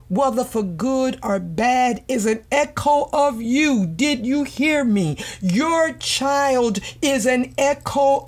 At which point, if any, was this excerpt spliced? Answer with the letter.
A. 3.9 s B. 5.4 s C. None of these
C